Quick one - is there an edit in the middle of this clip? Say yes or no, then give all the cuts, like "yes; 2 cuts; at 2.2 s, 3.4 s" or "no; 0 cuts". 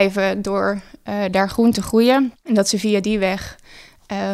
yes; 1 cut; at 2.4 s